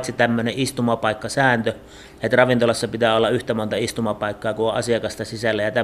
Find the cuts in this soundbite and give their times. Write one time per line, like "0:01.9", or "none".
none